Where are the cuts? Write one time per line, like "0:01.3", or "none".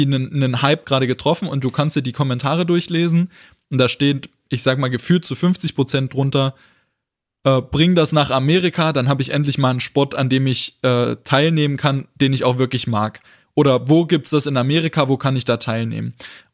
none